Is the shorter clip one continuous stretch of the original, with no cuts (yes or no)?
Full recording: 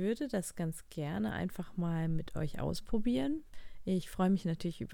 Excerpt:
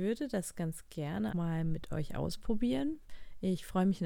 no